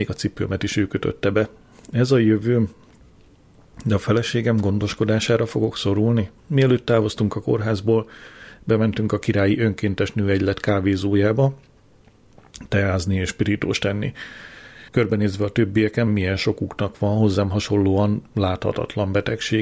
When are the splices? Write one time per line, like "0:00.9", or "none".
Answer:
0:06.4
0:14.9
0:16.1